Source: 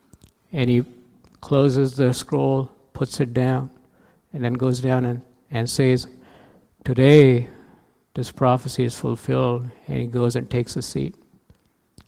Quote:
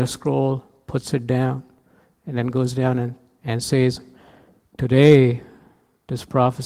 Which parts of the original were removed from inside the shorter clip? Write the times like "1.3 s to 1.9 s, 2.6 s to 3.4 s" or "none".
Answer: none